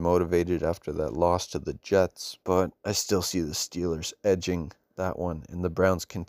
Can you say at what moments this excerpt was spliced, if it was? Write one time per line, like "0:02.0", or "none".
0:02.4